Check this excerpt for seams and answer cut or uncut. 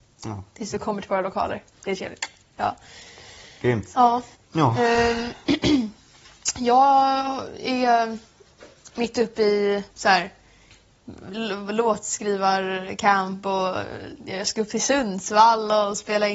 cut